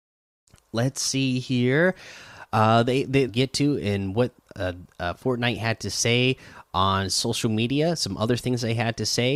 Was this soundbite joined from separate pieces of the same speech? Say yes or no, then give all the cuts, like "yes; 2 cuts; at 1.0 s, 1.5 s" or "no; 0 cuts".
yes; 1 cut; at 3.3 s